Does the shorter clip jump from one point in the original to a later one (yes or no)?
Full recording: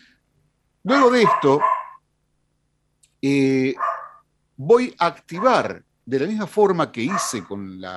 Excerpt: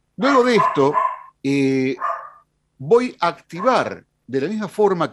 yes